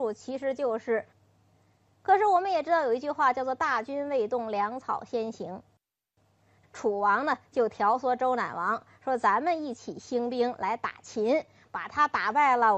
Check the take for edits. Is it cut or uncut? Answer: cut